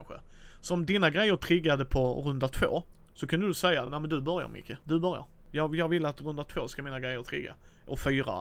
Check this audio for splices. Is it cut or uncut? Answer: uncut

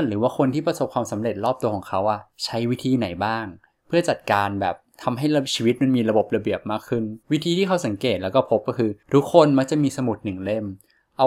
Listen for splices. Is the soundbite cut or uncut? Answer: cut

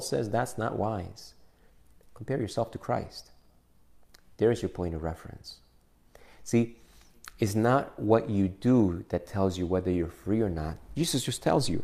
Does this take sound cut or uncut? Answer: uncut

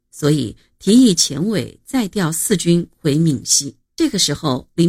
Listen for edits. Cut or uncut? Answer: cut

